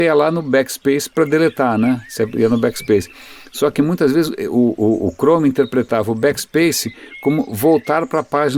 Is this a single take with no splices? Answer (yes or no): yes